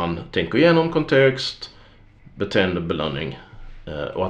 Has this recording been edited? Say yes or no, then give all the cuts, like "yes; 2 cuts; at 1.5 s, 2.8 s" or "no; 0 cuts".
yes; 1 cut; at 2.2 s